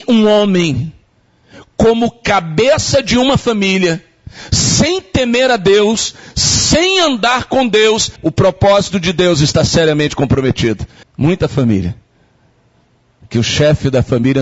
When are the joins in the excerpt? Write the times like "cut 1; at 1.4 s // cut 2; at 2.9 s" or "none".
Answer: cut 1; at 8.2 s // cut 2; at 11.0 s